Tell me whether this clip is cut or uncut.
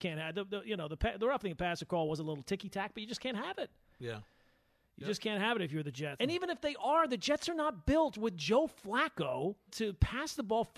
cut